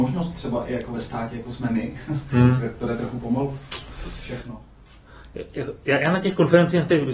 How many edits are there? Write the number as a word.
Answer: zero